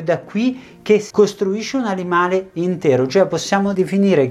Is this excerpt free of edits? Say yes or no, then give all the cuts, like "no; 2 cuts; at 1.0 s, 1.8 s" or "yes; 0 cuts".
no; 1 cut; at 1.1 s